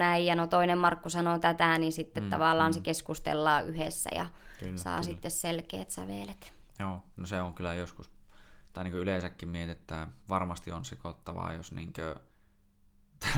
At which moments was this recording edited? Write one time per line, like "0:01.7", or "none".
0:10.2